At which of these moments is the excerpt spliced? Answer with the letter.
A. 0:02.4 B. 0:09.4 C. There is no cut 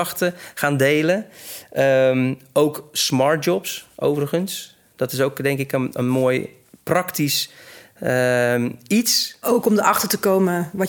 B